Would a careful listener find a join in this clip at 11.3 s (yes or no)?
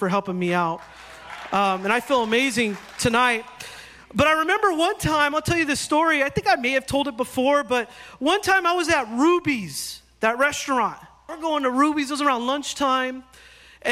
yes